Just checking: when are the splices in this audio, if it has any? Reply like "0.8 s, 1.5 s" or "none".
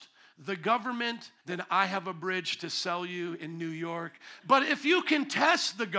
1.4 s, 4.4 s